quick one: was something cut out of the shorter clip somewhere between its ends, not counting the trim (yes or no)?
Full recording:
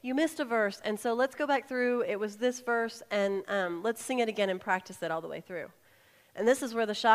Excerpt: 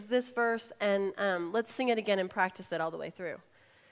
no